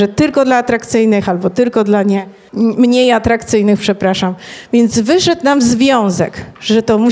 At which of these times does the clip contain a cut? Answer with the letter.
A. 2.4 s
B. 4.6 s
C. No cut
C